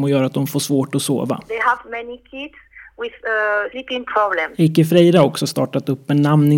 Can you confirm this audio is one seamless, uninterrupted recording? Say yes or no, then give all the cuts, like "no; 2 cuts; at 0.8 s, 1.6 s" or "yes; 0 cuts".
no; 1 cut; at 3.7 s